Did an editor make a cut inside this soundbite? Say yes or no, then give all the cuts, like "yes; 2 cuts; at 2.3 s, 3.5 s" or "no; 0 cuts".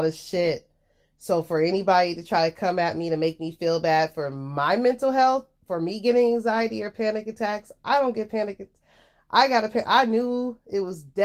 no; 0 cuts